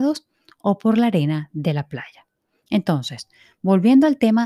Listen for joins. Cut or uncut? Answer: uncut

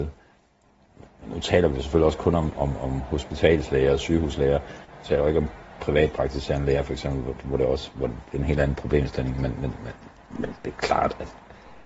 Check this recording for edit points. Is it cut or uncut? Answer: uncut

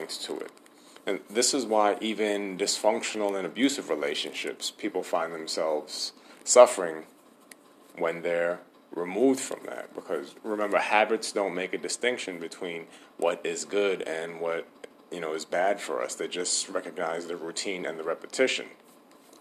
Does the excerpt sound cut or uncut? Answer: uncut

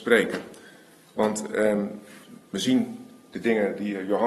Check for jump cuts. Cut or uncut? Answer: cut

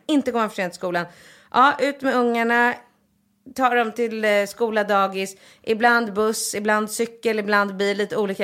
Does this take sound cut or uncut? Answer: uncut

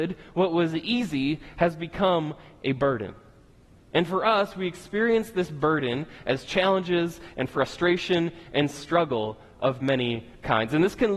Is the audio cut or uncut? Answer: uncut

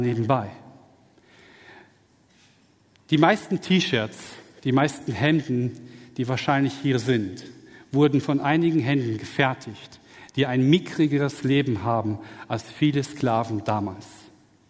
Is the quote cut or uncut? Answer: uncut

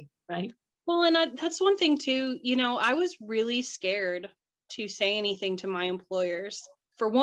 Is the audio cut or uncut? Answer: uncut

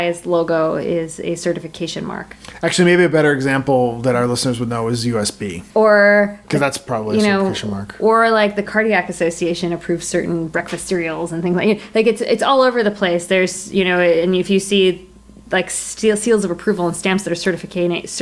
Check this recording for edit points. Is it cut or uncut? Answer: cut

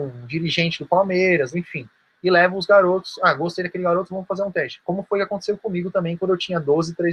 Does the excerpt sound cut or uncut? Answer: cut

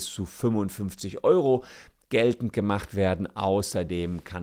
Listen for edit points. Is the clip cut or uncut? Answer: uncut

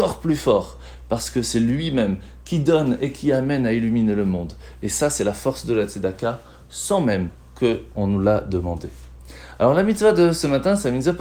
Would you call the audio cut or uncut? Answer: uncut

